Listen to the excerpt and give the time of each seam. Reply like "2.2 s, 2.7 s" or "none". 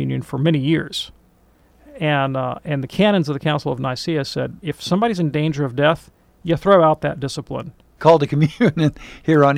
4.6 s, 8.0 s